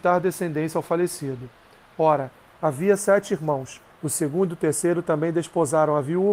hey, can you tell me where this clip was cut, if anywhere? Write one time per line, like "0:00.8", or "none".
0:03.9